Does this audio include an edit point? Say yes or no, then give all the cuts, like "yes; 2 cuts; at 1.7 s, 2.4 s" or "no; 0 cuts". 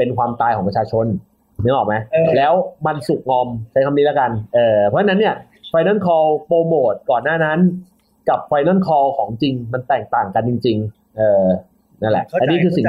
no; 0 cuts